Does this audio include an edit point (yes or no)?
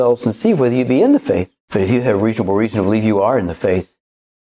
yes